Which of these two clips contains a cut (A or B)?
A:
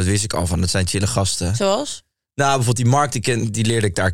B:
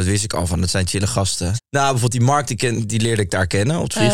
B